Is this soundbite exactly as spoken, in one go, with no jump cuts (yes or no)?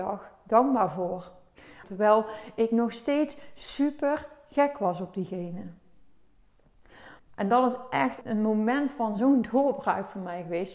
no